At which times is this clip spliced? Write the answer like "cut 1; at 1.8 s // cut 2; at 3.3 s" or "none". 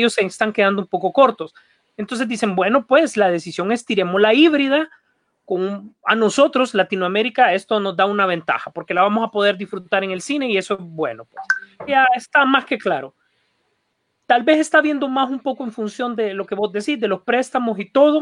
cut 1; at 11.9 s